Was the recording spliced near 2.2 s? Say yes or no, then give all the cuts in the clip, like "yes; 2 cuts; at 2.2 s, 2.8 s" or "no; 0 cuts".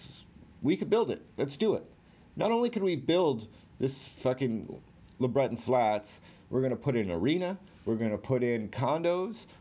no; 1 cut; at 7.7 s